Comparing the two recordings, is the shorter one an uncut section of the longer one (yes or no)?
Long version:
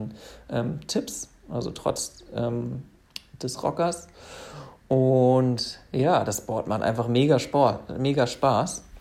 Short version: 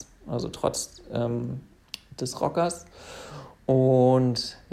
yes